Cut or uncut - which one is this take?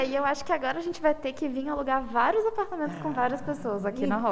uncut